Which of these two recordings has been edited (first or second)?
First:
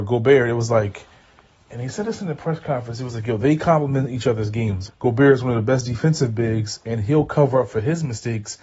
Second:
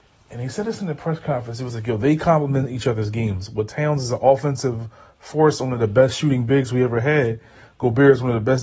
first